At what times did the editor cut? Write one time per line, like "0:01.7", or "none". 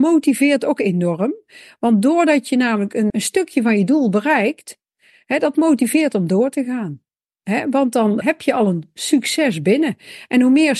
0:03.1
0:08.2